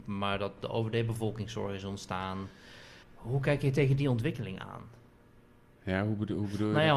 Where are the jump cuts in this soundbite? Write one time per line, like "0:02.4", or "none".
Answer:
0:03.0